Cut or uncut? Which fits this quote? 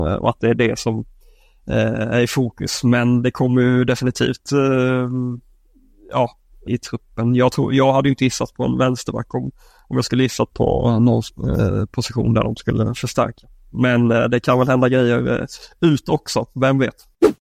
cut